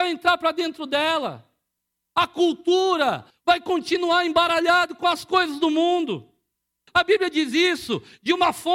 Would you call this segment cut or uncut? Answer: cut